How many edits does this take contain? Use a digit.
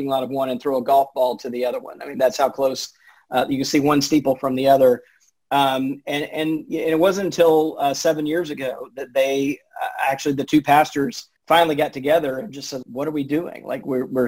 2